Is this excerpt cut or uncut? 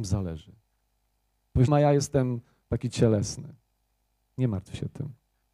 cut